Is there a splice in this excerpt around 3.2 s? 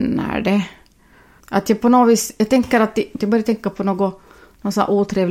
yes; 2 cuts; at 1.4 s, 3.2 s

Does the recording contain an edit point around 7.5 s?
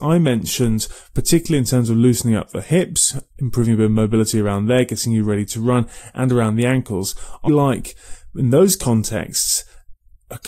yes; 1 cut; at 7.5 s

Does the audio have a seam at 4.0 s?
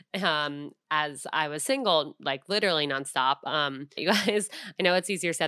yes; 1 cut; at 4.0 s

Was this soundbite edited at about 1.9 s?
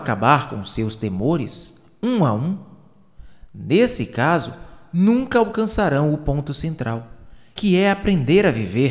no; 0 cuts

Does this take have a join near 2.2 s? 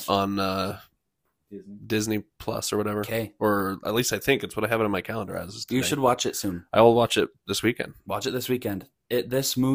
no; 1 cut; at 3.8 s

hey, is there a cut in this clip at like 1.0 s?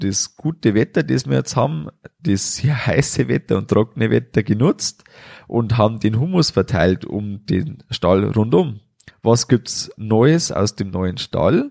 no; 1 cut; at 9.1 s

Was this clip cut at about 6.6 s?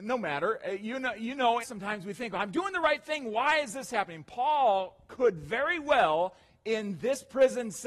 no; 1 cut; at 1.6 s

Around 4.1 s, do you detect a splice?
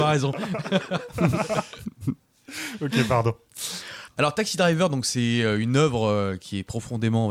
yes; 1 cut; at 4.1 s

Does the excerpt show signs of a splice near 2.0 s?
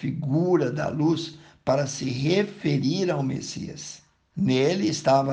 no; 1 cut; at 4.3 s

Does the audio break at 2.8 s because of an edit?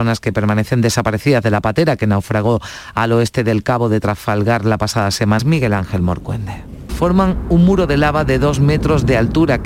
no; 2 cuts; at 5.4 s, 6.9 s

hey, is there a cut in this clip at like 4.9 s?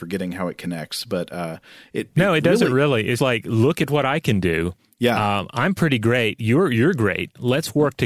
no; 1 cut; at 3.2 s

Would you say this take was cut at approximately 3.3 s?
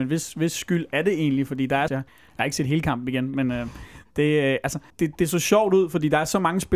no; 2 cuts; at 1.9 s, 4.9 s

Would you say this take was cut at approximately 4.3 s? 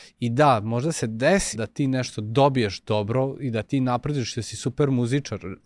no; 1 cut; at 1.5 s

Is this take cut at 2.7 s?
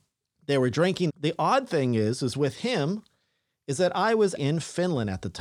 no; 2 cuts; at 1.1 s, 4.4 s

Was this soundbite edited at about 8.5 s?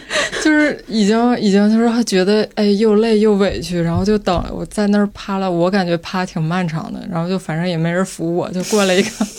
no; 0 cuts

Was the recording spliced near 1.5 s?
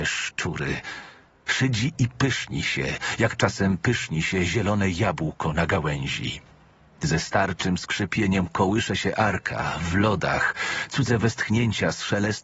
yes; 1 cut; at 1.5 s

